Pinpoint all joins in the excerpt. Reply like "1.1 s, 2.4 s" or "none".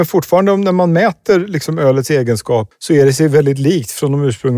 2.7 s